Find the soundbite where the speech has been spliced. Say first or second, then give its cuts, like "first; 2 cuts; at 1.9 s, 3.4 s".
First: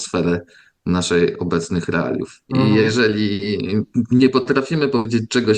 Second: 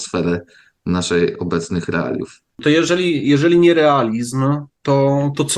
first; 1 cut; at 2.5 s